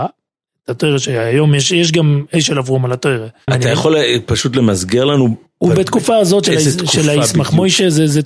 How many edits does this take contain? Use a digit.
1